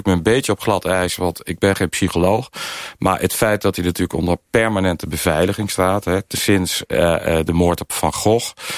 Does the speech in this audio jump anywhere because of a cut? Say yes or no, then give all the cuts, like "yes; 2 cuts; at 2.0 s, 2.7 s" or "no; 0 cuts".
no; 0 cuts